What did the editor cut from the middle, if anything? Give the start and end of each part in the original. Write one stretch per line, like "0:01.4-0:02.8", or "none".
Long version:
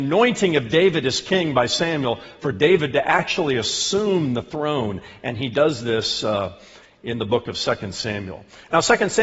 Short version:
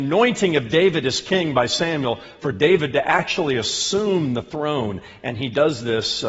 none

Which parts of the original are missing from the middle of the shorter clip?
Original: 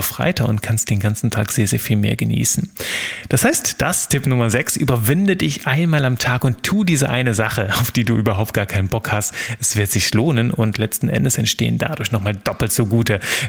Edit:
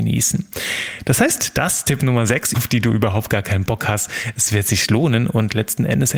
0:04.8-0:07.8

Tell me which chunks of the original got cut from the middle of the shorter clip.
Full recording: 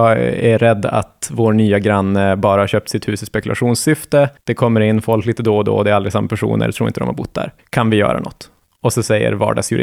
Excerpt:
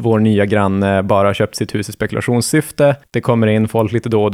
none

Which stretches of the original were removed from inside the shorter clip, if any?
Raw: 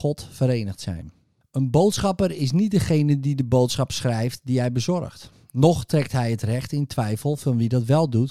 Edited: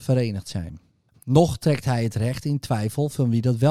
0:01.5-0:05.4

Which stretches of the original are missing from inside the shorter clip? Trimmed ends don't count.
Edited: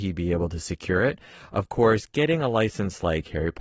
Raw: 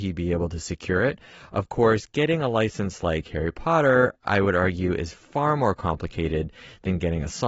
none

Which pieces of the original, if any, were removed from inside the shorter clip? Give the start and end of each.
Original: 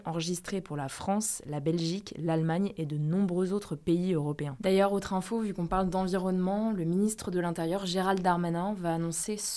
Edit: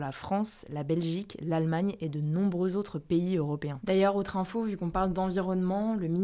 none

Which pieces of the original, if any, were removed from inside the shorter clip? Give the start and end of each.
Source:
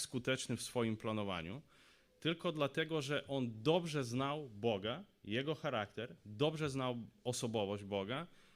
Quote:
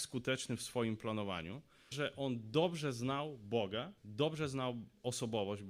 0:01.9-0:03.0
0:05.1-0:06.2

